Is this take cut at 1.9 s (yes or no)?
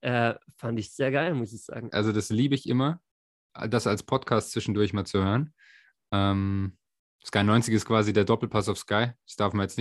yes